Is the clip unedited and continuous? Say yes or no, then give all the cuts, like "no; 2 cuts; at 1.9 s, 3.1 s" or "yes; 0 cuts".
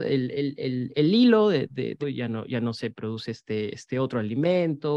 no; 1 cut; at 2.0 s